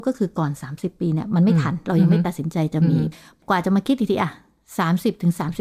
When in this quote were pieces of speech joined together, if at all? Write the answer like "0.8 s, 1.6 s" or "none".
none

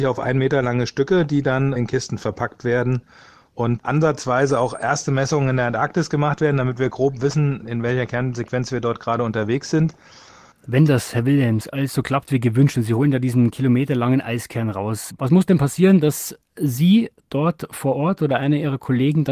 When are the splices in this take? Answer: 10.5 s

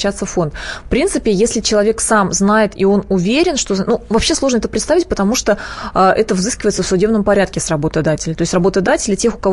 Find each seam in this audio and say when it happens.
none

